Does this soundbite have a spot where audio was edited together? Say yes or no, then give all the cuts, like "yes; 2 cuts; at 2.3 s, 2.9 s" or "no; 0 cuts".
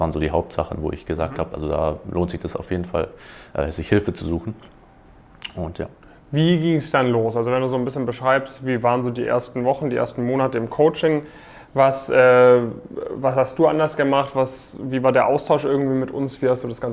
no; 0 cuts